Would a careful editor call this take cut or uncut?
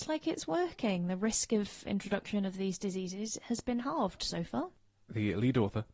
uncut